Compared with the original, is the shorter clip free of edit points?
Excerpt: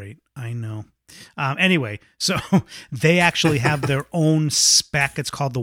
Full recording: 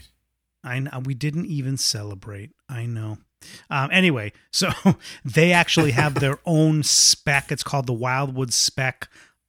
yes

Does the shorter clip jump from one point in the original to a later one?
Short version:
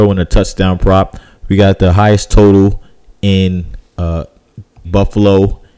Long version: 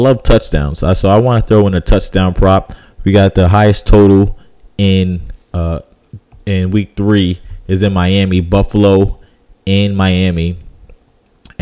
yes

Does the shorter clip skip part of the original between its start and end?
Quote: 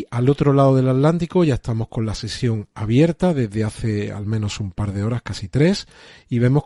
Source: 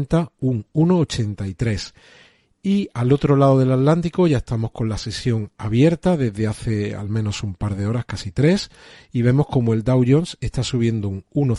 no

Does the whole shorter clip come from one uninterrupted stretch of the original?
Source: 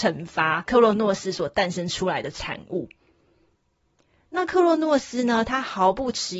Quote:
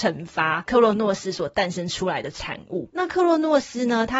no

